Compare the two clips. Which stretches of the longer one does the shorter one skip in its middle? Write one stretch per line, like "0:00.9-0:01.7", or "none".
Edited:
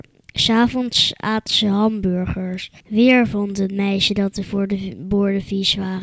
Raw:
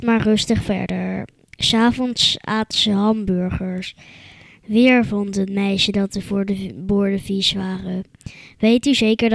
0:04.0-0:04.6

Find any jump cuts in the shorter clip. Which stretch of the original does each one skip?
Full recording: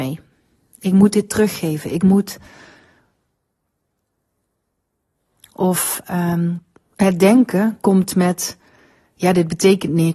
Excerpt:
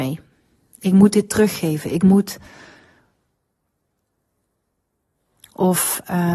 none

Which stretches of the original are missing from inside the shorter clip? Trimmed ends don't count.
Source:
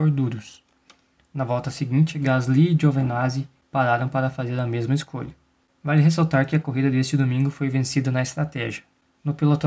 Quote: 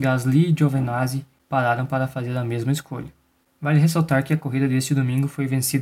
none

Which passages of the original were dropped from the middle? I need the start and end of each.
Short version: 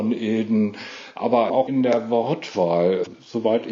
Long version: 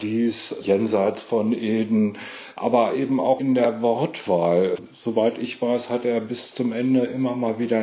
0:02.9-0:03.2

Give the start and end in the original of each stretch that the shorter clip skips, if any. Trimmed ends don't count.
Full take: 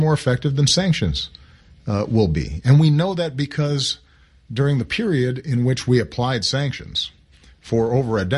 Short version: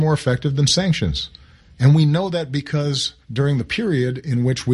0:01.8-0:02.6
0:04.1-0:04.4

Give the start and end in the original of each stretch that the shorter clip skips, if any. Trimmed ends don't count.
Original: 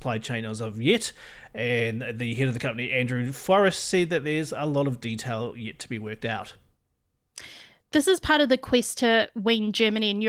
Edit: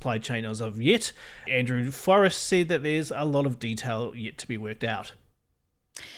0:01.5-0:02.9

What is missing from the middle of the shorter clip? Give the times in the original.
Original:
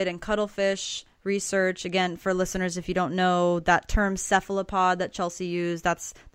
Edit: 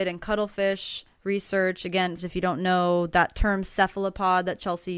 0:02.2-0:02.7

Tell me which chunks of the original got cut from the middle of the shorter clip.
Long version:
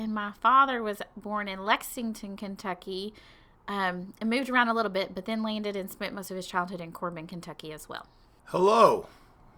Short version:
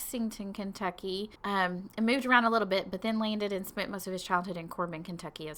0:03.2-0:03.6

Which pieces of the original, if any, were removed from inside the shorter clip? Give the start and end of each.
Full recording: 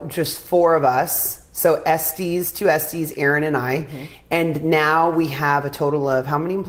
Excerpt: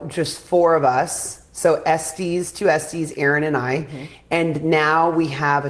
none

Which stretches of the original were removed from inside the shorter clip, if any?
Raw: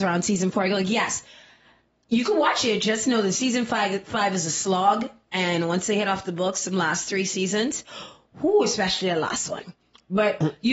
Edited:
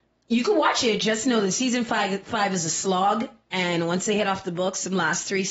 none

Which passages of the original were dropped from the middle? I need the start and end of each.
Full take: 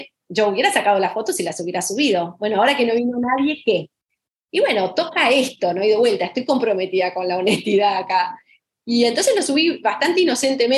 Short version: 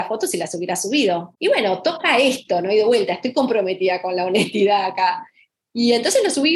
0:02.4-0:04.4

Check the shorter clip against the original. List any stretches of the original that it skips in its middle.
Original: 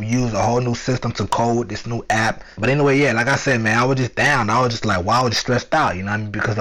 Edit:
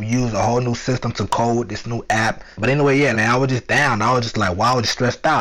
0:03.1-0:03.6

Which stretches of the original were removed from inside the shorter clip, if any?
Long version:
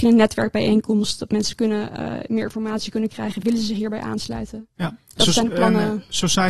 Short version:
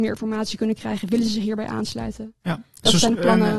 none

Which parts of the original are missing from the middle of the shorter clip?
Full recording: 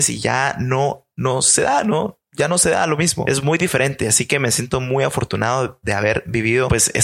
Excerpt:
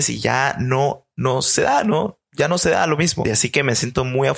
0:03.2-0:04.0

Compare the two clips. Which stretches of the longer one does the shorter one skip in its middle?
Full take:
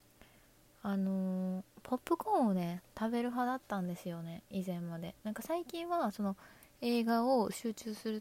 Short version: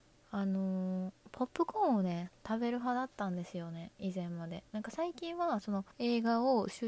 0:06.4-0:06.7

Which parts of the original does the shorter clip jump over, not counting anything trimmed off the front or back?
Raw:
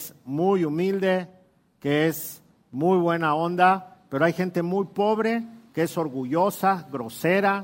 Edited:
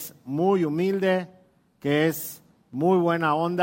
none

